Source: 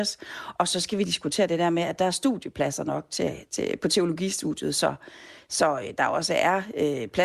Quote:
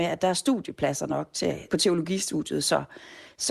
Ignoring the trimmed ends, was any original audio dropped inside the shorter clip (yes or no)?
yes